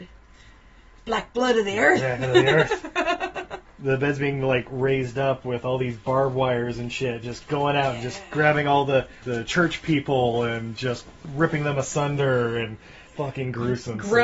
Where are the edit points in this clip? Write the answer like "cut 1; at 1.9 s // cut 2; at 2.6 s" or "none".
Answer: cut 1; at 3.6 s